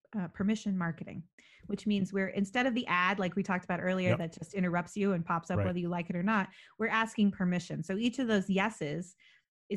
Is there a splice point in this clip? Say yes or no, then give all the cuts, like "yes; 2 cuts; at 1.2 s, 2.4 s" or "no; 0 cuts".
no; 0 cuts